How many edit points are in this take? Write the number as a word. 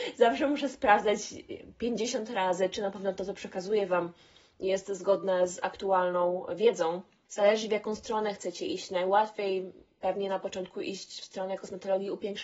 one